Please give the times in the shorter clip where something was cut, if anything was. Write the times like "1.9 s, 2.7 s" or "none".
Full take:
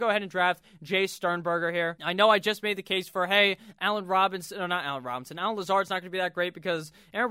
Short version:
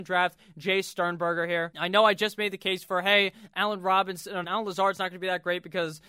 4.4 s